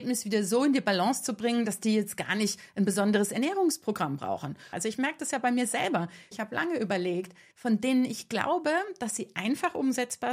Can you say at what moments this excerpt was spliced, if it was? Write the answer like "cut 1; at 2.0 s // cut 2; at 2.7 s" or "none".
cut 1; at 4.7 s // cut 2; at 6.3 s // cut 3; at 7.5 s